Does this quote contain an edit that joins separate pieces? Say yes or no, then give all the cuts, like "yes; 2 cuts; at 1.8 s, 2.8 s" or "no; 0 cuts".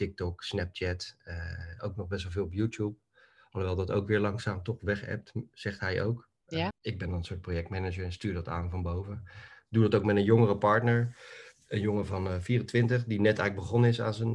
yes; 1 cut; at 6.7 s